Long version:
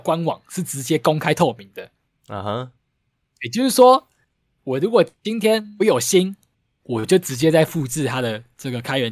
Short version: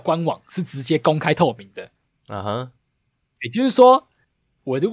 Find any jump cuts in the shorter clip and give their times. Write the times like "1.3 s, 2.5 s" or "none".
none